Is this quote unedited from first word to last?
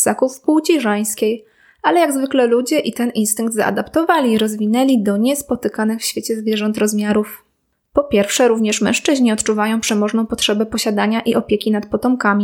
yes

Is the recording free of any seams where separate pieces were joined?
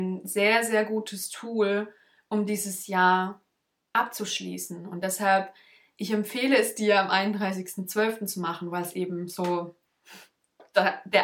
yes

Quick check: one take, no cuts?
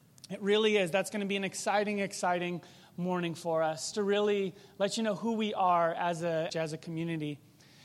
no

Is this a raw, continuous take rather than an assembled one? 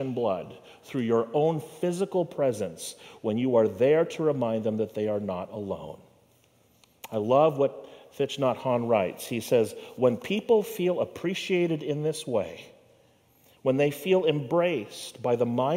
yes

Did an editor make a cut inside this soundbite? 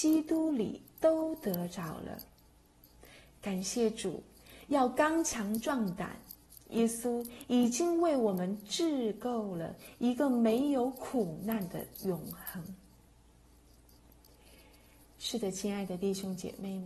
no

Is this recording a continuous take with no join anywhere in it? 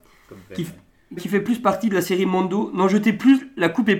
no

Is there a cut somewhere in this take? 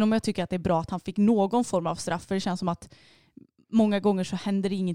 no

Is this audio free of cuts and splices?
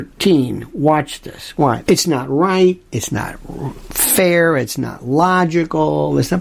no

